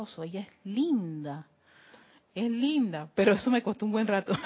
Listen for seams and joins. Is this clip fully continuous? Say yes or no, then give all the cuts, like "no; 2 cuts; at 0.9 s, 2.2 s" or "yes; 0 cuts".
yes; 0 cuts